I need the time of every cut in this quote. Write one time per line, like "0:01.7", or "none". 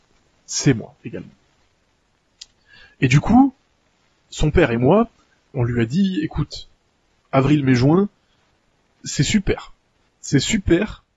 0:05.5

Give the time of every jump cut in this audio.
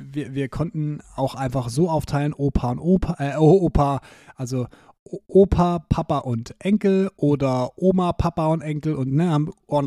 none

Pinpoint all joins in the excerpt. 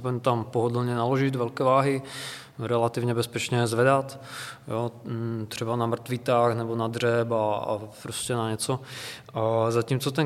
none

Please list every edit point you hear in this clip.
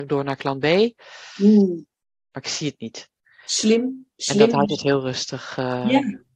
0:02.3

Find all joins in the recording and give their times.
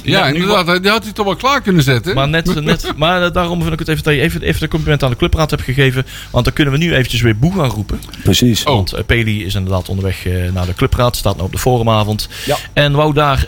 none

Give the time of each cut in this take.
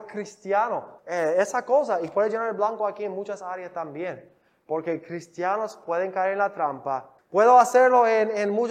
0:01.0
0:07.2

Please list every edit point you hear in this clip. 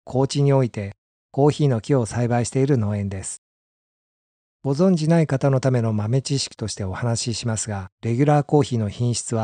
0:07.9

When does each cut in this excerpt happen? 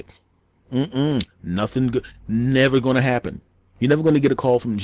none

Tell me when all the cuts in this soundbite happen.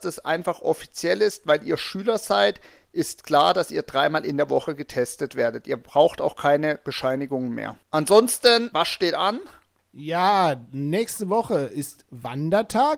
0:08.7

